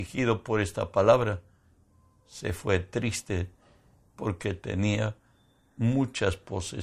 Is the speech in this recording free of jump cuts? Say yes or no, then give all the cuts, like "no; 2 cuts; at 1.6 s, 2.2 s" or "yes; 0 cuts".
yes; 0 cuts